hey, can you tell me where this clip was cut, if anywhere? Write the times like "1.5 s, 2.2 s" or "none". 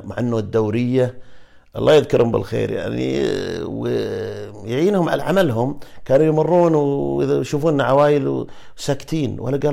5.2 s

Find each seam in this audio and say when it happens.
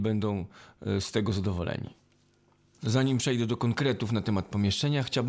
none

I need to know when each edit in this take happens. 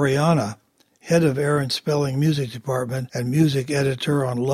none

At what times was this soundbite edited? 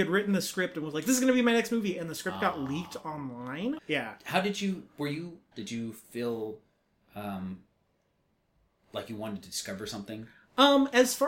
3.8 s, 5.5 s

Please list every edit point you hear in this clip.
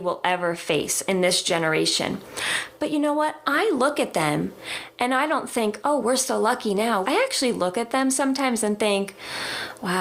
6.0 s, 7.0 s

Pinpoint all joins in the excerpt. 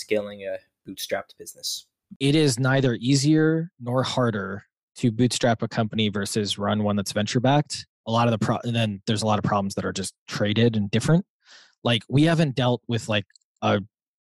7.9 s

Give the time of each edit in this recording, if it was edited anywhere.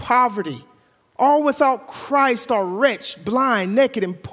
none

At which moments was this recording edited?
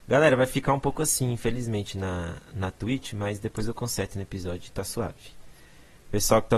none

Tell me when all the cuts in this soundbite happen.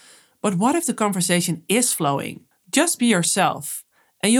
2.5 s

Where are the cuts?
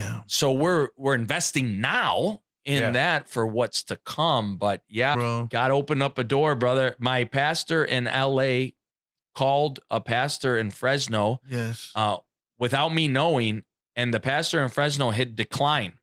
5.1 s

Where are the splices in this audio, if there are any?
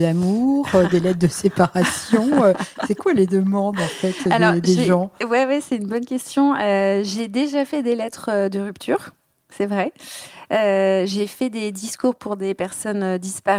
none

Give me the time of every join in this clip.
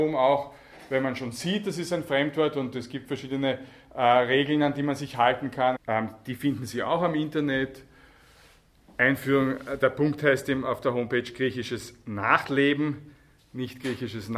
5.7 s, 9.8 s

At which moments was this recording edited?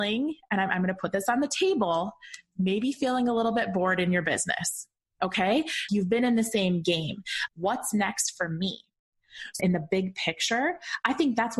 5.9 s, 7.5 s, 9.6 s

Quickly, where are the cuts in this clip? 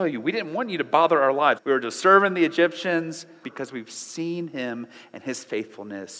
1.6 s, 3.4 s

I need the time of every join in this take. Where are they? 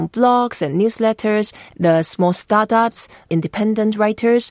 1.7 s, 3.3 s

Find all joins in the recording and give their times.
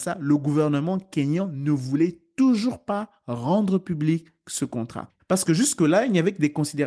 5.2 s

